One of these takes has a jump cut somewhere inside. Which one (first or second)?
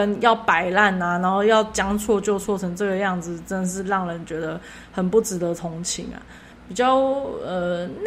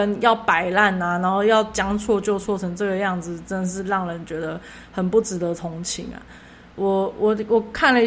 first